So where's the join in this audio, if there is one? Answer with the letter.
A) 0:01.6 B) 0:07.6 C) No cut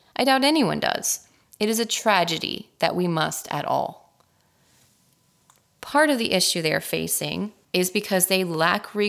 B